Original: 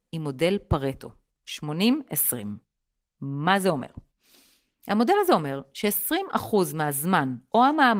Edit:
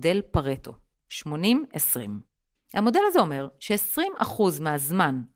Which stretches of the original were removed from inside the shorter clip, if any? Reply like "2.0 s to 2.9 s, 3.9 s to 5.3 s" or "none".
2.9 s to 4.7 s